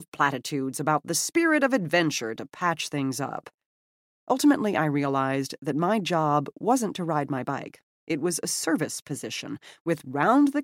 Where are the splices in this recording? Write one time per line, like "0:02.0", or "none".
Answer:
none